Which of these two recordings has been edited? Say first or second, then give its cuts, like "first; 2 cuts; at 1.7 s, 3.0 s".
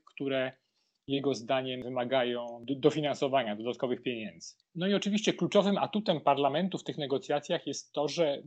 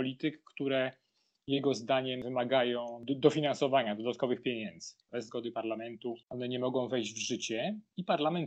second; 2 cuts; at 5.1 s, 6.2 s